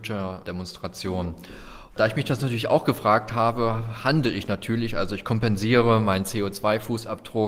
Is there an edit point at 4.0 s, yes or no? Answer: no